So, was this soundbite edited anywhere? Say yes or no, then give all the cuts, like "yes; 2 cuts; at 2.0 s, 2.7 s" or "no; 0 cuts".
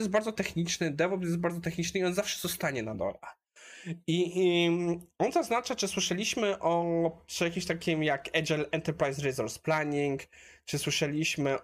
no; 0 cuts